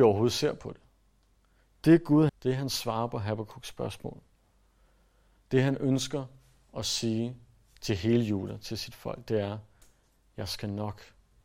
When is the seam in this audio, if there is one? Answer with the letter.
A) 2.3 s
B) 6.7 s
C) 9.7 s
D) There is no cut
A